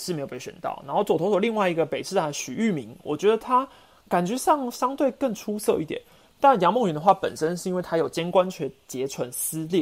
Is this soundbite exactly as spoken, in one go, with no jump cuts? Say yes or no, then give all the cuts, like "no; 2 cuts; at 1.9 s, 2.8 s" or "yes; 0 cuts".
yes; 0 cuts